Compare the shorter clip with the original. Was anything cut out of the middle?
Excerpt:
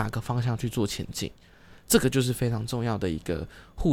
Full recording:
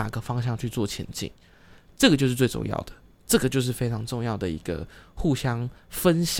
yes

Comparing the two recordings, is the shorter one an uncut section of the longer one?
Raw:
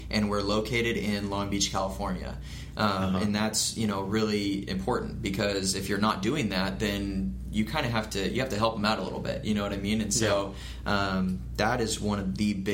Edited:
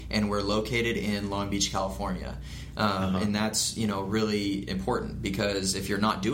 yes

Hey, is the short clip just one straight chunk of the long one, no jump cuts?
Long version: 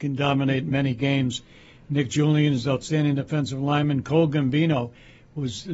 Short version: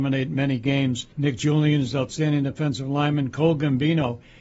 no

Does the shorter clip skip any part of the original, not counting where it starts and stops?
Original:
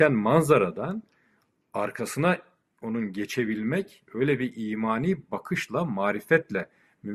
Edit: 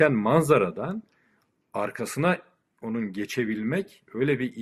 no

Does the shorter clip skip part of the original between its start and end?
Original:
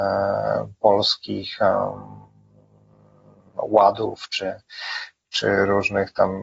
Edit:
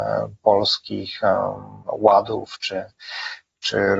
yes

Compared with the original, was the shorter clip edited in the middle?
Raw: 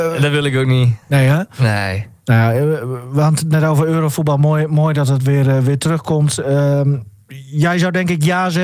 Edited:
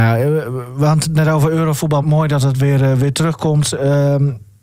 yes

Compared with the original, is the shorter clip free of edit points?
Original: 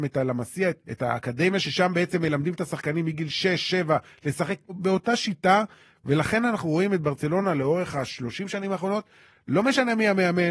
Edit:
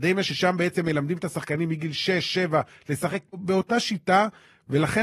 yes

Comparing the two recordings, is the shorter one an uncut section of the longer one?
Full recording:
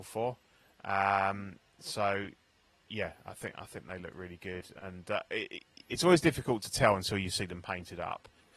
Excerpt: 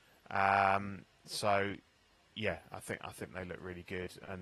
yes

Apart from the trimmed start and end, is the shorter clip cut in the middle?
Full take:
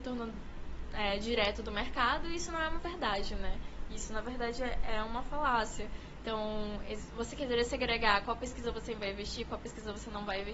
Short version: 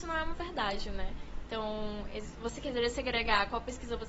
yes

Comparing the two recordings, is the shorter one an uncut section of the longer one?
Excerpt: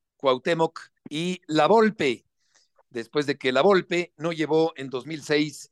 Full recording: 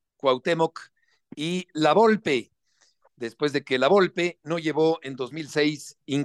no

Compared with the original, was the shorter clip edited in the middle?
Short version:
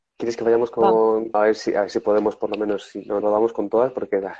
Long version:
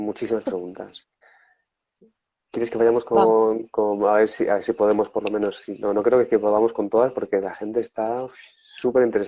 yes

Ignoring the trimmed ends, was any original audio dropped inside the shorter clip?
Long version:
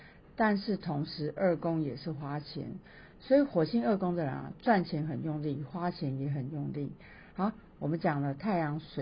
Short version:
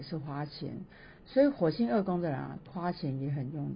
yes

